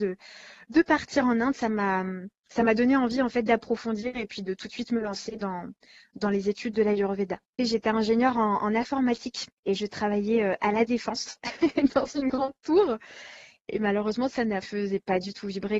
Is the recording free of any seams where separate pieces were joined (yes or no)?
no